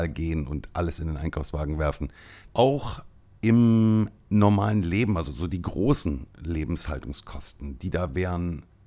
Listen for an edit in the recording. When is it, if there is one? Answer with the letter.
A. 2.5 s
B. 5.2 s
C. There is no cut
A